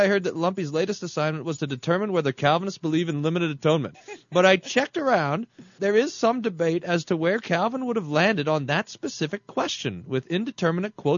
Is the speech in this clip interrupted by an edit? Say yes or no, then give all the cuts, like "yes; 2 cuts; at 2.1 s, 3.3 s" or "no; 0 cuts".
yes; 2 cuts; at 3.9 s, 5.8 s